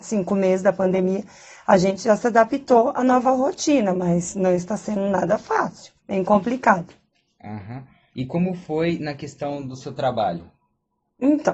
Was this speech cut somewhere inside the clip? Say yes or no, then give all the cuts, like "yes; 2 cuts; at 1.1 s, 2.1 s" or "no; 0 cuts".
yes; 2 cuts; at 6.0 s, 8.1 s